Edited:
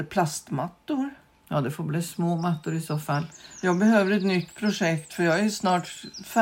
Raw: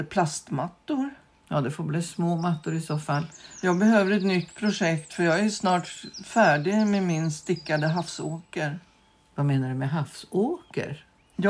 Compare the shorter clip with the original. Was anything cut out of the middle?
no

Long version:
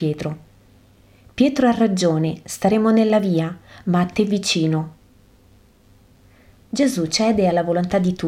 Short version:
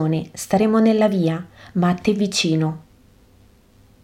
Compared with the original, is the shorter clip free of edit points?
yes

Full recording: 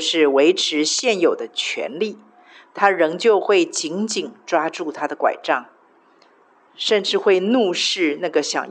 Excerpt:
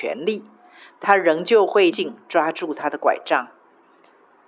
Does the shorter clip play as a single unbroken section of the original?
no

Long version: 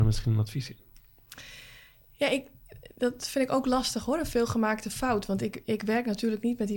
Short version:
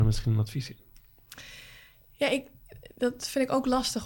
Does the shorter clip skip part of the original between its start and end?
no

